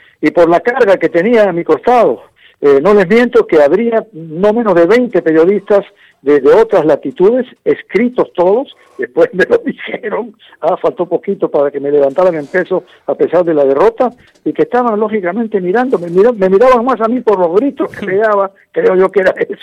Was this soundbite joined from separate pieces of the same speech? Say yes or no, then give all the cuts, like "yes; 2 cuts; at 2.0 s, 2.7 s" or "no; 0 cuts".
no; 0 cuts